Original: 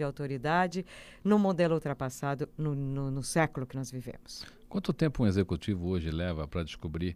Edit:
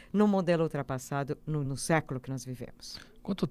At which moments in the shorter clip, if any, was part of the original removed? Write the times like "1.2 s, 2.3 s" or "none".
1.6 s